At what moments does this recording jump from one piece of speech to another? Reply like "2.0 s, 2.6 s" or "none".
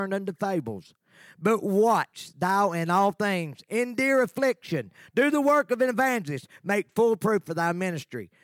none